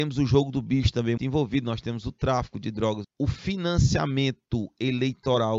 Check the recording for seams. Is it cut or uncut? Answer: cut